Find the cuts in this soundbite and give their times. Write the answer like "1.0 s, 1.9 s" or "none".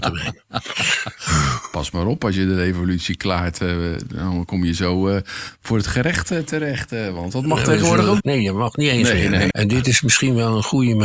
8.2 s, 9.5 s